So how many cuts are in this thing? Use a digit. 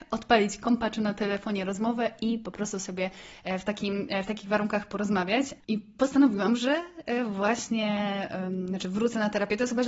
1